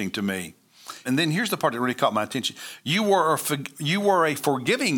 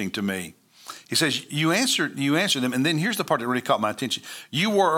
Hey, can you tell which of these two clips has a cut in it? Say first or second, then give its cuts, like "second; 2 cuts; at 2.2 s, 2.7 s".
first; 1 cut; at 1.0 s